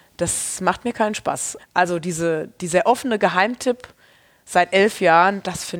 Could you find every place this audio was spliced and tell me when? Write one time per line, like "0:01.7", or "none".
0:01.6

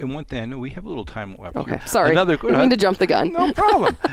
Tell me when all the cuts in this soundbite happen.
0:01.8

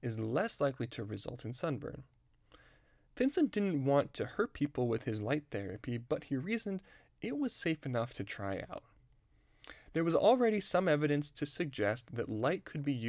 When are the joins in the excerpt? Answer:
0:09.9

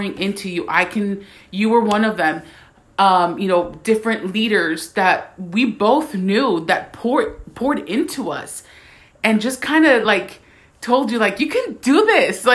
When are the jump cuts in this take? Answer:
none

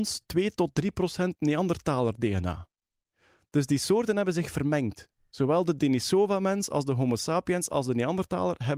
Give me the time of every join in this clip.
none

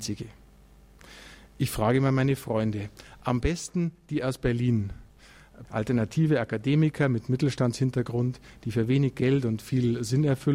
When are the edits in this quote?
0:05.6

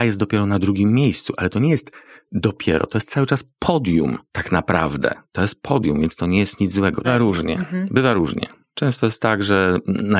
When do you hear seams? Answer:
0:04.3
0:07.0

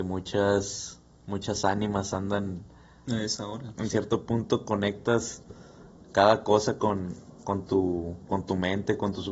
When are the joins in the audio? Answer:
0:03.7

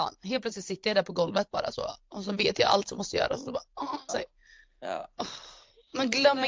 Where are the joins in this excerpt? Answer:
0:04.1

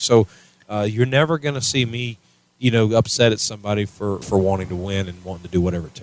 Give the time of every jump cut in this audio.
0:04.2

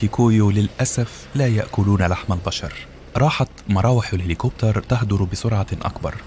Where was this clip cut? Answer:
0:03.1

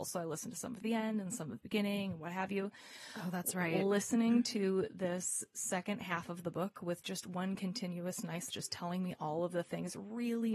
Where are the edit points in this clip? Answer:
0:08.5

